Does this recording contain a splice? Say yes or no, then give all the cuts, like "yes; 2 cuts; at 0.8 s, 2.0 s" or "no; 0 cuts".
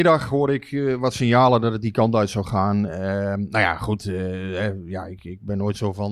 no; 0 cuts